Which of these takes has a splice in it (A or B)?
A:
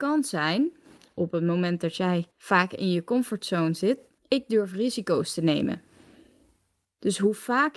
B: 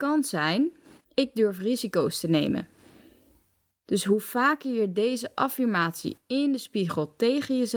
B